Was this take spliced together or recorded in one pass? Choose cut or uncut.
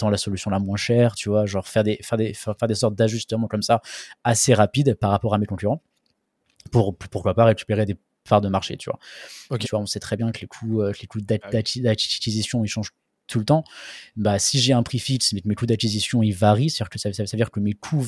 cut